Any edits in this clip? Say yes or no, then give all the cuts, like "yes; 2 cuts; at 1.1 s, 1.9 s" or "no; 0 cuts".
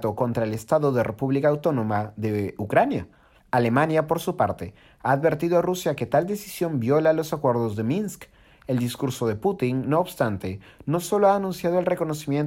yes; 1 cut; at 3.4 s